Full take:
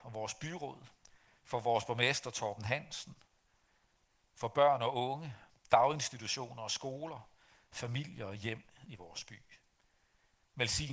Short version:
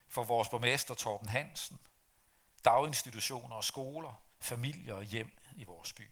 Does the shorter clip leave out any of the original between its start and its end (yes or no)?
yes